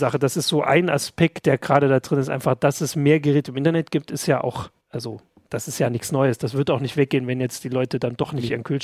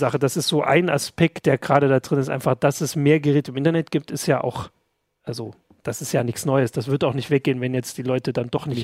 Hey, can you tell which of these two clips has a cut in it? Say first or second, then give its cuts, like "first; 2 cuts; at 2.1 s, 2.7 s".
first; 1 cut; at 4.8 s